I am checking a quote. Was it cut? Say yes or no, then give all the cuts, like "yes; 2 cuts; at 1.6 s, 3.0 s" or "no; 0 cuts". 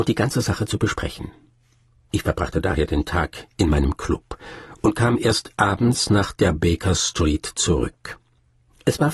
yes; 1 cut; at 1.9 s